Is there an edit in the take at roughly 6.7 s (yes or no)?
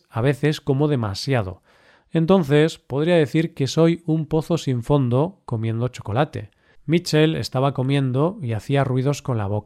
yes